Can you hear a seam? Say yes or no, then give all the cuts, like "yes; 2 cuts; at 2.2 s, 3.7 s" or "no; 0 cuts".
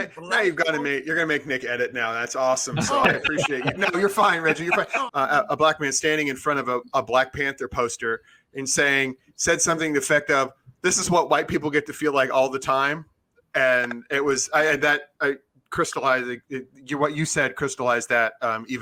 yes; 1 cut; at 5.1 s